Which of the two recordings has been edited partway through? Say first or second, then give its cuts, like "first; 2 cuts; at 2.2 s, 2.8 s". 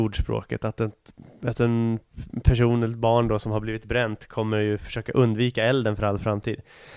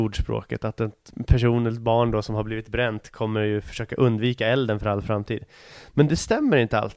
second; 1 cut; at 1.1 s